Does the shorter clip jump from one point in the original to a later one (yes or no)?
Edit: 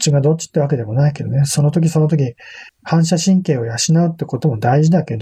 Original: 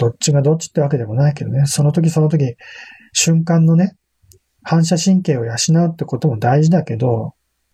yes